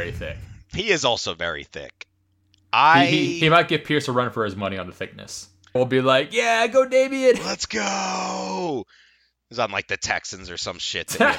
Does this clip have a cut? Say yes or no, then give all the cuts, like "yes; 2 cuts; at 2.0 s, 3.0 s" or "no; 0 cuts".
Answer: yes; 1 cut; at 5.8 s